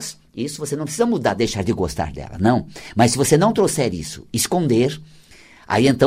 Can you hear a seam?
no; 0 cuts

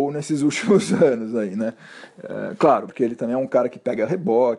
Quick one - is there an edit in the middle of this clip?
yes; 1 cut; at 2.9 s

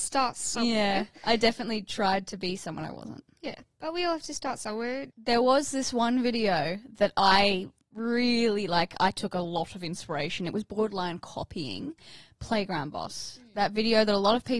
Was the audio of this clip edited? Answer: yes; 1 cut; at 5.1 s

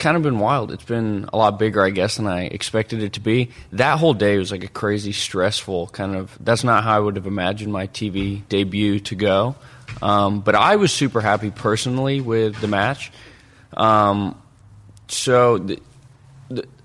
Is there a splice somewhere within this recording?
no; 0 cuts

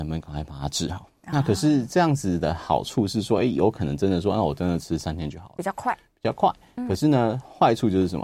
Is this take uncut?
yes; 0 cuts

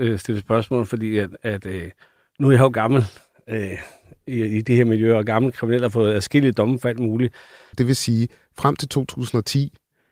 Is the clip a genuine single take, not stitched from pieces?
no; 1 cut; at 7.7 s

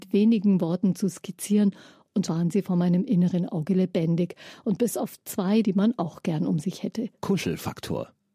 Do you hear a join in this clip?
yes; 3 cuts; at 2.3 s, 5.6 s, 7.2 s

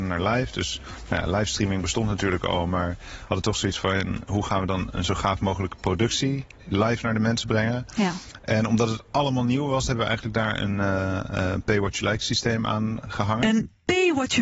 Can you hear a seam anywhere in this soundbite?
no; 0 cuts

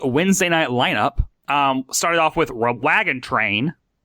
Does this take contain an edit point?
no; 0 cuts

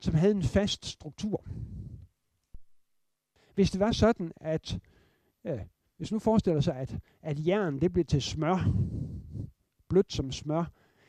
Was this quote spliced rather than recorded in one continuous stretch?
yes; 1 cut; at 3.4 s

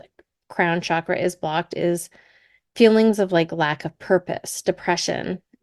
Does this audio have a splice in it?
no; 0 cuts

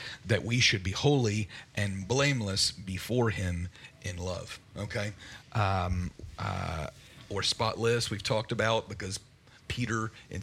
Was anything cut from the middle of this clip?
yes; 1 cut; at 5.4 s

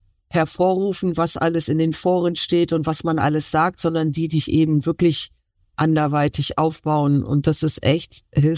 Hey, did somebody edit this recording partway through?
no; 0 cuts

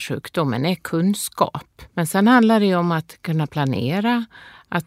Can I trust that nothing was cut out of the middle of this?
no; 1 cut; at 1.9 s

